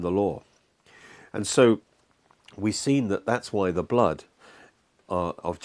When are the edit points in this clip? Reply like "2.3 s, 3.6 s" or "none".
none